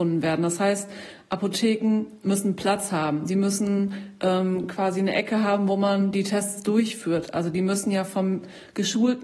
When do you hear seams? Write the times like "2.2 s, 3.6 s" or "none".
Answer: none